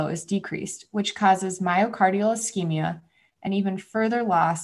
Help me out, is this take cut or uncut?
uncut